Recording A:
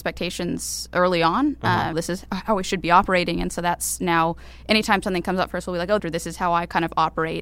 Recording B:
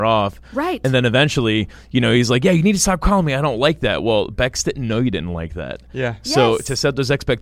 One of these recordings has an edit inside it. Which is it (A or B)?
A